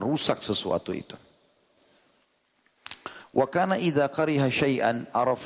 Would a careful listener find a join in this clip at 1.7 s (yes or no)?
no